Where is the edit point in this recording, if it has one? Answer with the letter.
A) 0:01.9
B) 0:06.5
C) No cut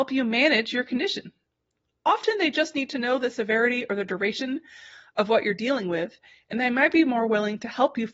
C